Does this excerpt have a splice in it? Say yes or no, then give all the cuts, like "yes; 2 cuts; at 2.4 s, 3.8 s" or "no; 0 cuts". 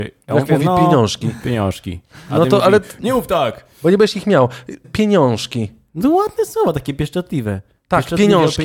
yes; 1 cut; at 4.8 s